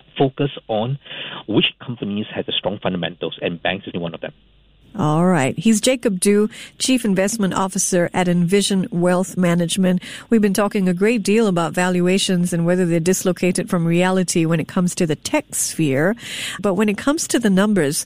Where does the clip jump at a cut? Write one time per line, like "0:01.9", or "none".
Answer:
0:03.9
0:16.6